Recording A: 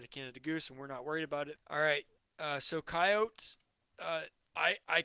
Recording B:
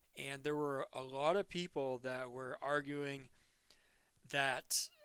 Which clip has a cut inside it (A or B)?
A